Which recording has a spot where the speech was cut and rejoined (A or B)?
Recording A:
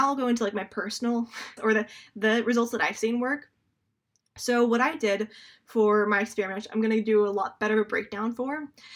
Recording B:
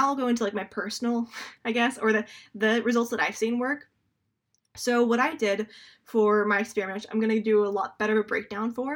A